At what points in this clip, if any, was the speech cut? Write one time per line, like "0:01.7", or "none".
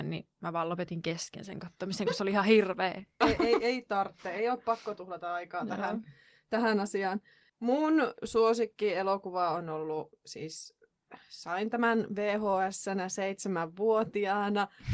0:03.2